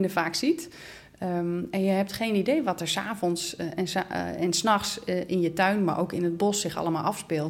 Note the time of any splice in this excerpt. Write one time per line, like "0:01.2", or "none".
none